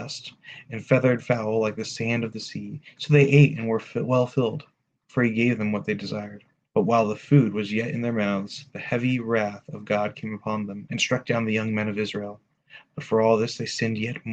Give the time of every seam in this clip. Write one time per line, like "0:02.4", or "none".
0:03.0
0:06.7
0:10.9